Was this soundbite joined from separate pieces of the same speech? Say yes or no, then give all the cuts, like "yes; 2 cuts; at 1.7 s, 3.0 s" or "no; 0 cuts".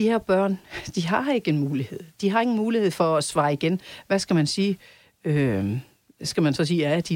no; 0 cuts